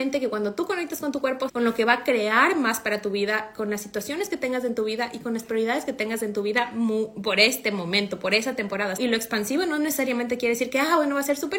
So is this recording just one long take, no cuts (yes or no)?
no